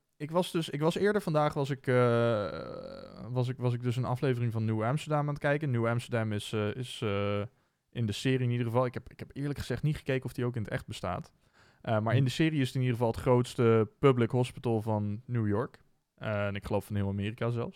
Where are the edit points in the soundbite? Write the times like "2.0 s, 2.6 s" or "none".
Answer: none